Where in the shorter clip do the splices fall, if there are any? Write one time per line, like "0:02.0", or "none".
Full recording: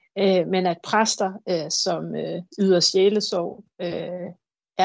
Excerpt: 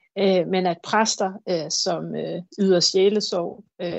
none